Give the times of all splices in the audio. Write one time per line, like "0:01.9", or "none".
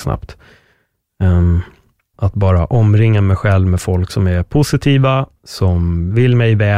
0:02.1